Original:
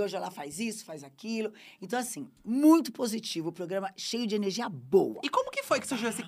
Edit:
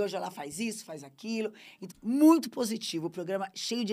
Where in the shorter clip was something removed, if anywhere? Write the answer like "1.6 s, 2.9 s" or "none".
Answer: 1.9 s